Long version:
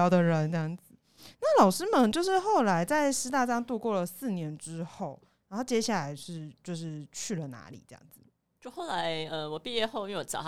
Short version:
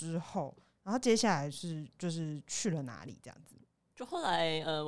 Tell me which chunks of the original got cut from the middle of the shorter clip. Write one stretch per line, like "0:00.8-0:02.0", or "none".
none